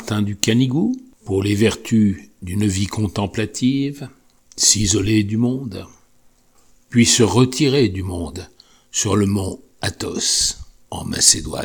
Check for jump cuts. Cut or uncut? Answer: uncut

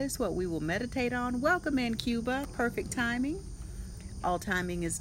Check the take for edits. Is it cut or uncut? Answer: uncut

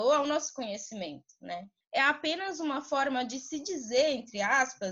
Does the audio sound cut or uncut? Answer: cut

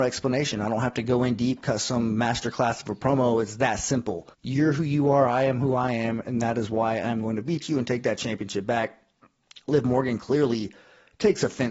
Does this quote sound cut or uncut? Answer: cut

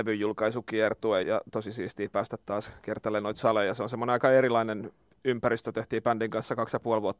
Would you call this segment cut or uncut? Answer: cut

